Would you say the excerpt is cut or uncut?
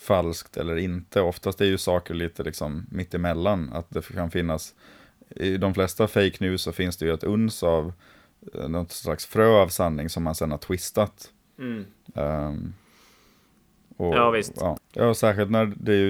cut